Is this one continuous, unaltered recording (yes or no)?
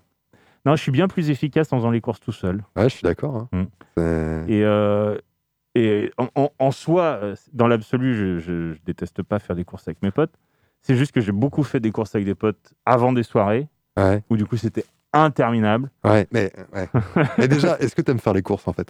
no